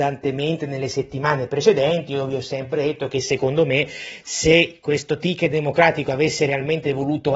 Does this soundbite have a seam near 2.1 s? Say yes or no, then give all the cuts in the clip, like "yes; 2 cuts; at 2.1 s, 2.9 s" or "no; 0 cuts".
no; 0 cuts